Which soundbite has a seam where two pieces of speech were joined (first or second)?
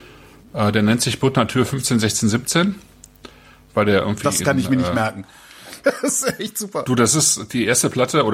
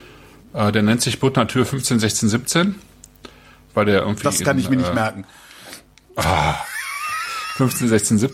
first